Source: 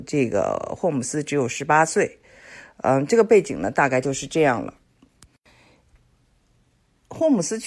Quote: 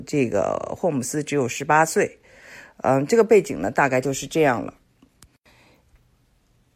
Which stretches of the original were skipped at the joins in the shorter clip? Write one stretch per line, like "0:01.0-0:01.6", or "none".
none